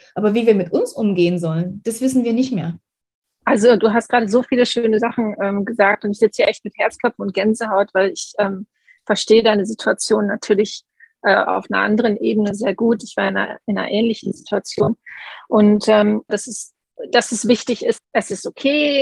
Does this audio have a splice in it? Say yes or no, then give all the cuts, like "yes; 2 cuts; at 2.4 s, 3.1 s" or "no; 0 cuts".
yes; 3 cuts; at 3.4 s, 16.3 s, 18.0 s